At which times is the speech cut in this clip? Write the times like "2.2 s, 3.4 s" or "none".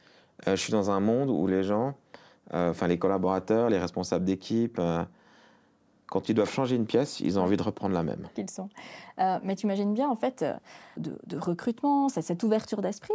8.4 s, 11.0 s